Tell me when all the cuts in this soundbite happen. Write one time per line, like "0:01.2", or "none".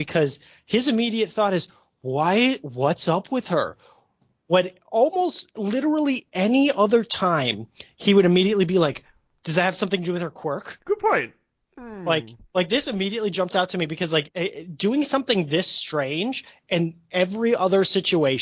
none